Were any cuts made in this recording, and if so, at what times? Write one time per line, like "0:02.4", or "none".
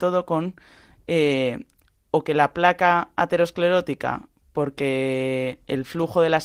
none